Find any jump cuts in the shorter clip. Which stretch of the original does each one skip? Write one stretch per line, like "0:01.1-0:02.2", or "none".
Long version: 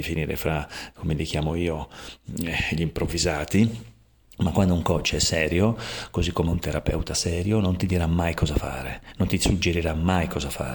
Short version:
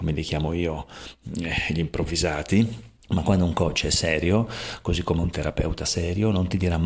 0:04.0-0:04.3